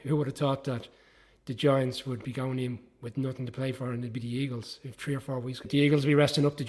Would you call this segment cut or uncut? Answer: cut